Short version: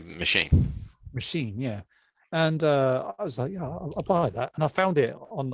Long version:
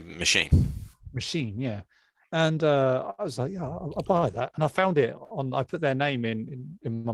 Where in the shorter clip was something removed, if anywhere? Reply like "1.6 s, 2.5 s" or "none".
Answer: none